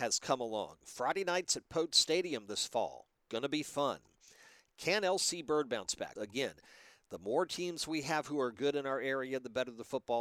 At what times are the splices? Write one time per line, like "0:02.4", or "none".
0:06.2